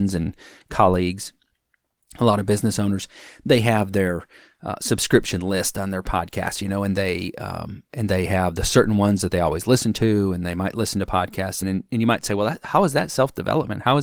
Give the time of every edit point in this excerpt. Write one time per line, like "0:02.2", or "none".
0:11.6

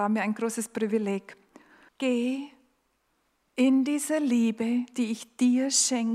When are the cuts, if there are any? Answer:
0:01.9

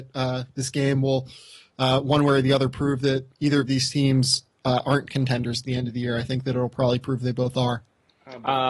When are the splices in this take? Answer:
none

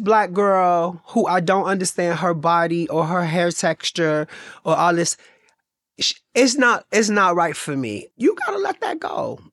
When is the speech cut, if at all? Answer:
0:08.1

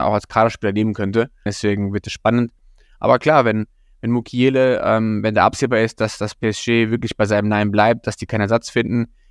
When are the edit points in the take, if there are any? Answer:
0:01.5

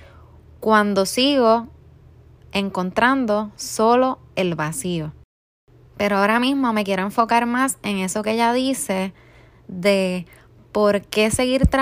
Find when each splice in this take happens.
0:05.9

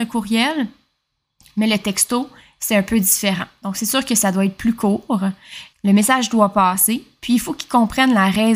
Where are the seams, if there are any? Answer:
0:05.7

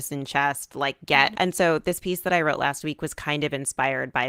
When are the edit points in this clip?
0:01.3

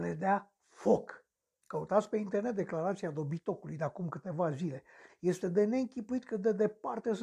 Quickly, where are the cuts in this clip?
0:01.6
0:05.1

